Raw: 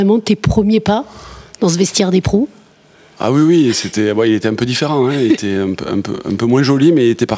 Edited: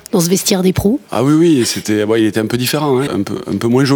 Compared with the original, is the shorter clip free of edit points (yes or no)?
no